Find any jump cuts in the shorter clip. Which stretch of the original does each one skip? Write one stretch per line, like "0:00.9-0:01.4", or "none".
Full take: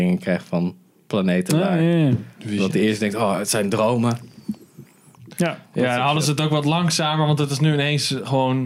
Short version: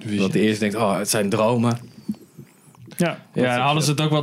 none